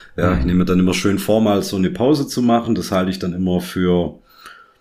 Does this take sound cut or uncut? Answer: uncut